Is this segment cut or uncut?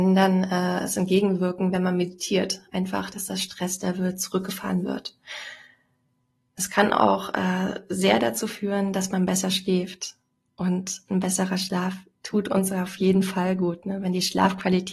uncut